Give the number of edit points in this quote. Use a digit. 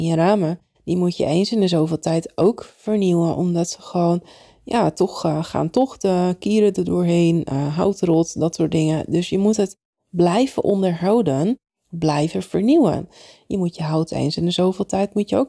0